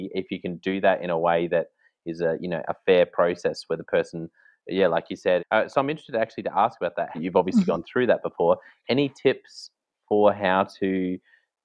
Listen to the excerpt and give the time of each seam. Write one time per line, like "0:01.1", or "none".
0:05.4
0:07.1